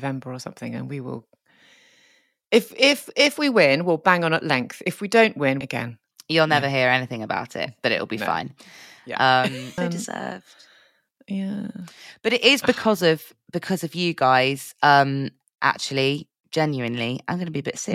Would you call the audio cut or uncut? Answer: cut